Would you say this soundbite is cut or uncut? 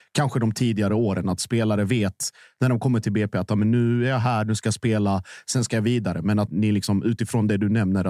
cut